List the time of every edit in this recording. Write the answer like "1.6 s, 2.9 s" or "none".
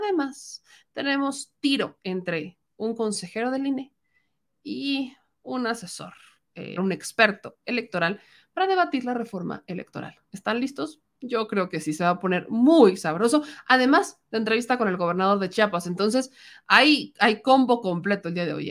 6.8 s